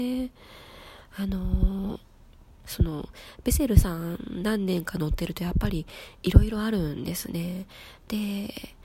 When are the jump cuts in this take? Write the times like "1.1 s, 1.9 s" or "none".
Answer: none